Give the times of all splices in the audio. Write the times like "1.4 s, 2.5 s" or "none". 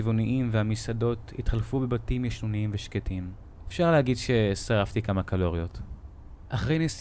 3.6 s